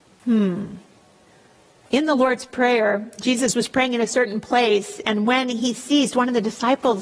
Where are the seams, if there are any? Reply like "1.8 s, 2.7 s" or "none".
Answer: none